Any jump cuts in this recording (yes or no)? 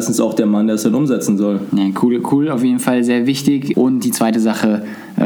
yes